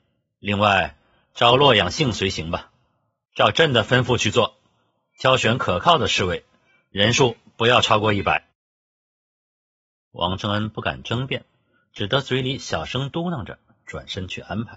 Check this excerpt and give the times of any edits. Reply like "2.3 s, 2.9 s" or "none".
3.3 s